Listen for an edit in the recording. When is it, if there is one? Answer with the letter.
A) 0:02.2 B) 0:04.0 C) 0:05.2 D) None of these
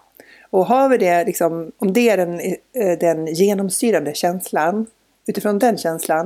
C